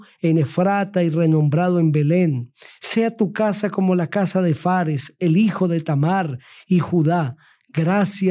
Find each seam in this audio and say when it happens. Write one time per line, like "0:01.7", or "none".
none